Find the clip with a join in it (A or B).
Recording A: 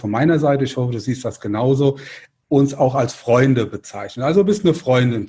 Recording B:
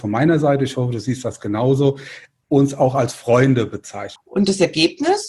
B